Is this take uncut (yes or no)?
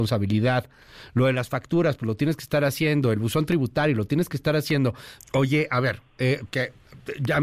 no